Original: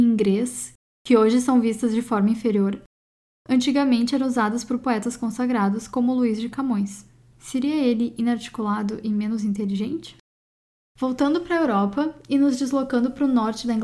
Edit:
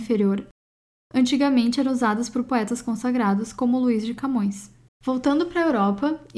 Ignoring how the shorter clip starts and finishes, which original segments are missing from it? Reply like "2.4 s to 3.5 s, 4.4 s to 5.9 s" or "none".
7.2 s to 10.8 s